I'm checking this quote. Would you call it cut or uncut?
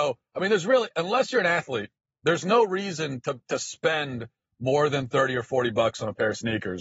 uncut